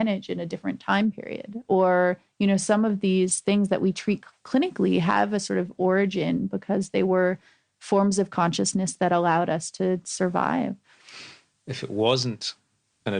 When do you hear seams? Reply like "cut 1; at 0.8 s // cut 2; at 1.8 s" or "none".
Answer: cut 1; at 4.4 s